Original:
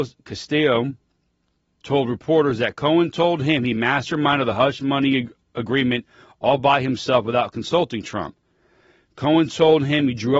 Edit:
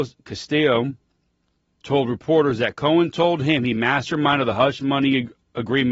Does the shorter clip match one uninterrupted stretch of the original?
yes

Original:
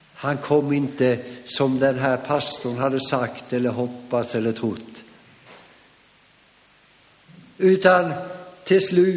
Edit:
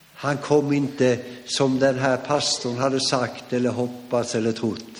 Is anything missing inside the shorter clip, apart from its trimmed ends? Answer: no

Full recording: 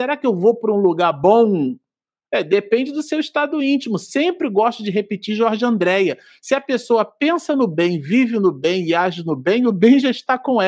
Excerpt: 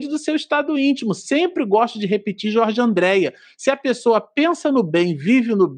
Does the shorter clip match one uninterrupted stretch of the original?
yes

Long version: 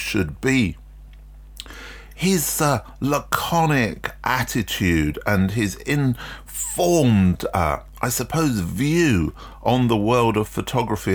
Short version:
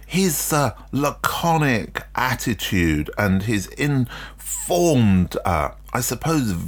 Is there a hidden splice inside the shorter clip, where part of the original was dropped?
no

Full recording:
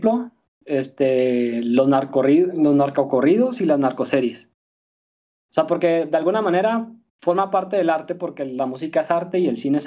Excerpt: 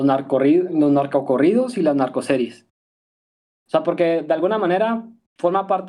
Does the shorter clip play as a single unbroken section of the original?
yes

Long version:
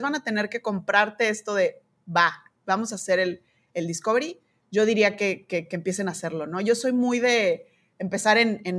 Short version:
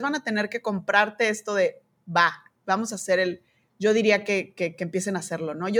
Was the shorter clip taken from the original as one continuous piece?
no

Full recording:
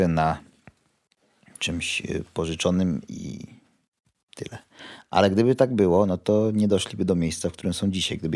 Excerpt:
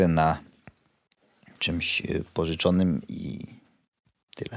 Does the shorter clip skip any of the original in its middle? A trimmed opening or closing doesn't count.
no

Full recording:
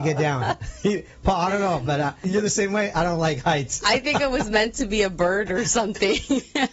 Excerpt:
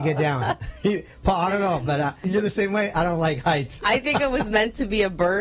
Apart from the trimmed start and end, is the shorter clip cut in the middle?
no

